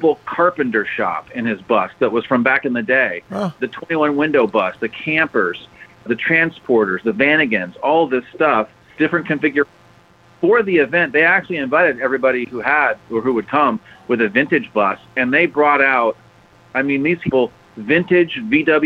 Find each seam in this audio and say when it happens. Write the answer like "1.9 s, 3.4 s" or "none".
9.0 s

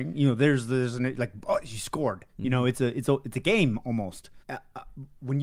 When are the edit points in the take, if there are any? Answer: 4.4 s

